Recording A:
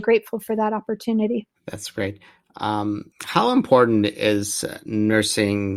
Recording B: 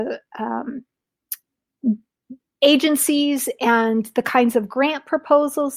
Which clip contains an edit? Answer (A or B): A